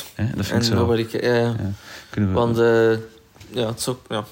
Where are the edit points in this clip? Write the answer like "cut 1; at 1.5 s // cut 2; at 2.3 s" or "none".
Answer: none